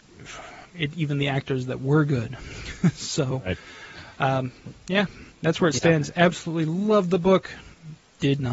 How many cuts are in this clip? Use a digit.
1